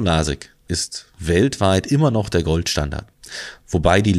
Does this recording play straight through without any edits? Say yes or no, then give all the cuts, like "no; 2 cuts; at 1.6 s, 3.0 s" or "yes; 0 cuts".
yes; 0 cuts